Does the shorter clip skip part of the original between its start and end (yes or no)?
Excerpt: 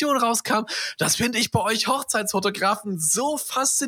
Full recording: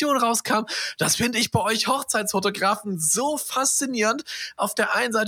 no